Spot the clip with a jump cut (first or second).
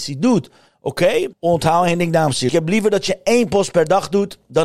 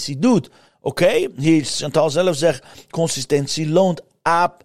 first